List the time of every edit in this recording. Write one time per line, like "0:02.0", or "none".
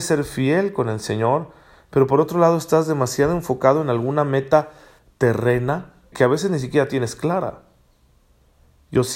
0:06.1